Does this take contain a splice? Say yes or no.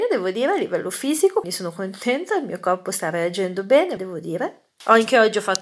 yes